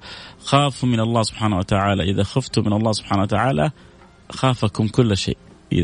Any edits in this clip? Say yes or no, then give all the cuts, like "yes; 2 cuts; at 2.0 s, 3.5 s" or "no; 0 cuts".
no; 0 cuts